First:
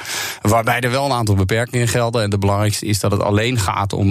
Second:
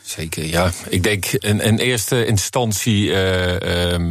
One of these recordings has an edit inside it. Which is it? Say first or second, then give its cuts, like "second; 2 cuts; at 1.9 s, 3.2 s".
second; 1 cut; at 1.4 s